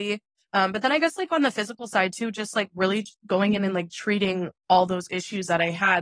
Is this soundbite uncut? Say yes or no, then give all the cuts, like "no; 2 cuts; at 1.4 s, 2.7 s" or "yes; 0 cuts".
yes; 0 cuts